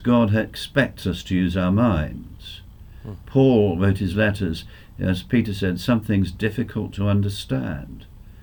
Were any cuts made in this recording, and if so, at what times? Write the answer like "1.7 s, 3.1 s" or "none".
none